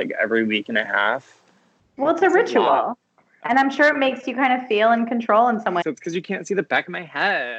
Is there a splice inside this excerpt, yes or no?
yes